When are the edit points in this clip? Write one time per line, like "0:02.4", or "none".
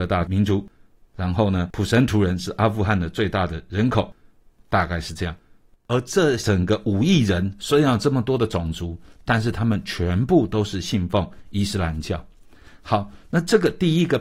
none